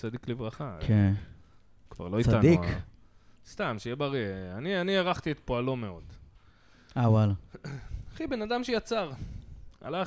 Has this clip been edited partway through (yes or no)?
no